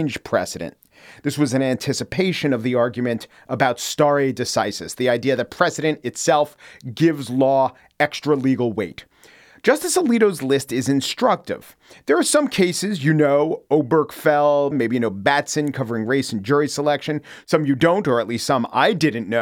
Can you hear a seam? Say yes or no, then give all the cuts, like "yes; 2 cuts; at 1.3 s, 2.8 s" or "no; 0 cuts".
yes; 1 cut; at 14.7 s